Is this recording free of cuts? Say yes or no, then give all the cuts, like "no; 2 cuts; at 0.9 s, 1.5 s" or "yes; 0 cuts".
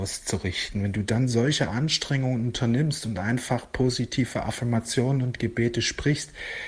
yes; 0 cuts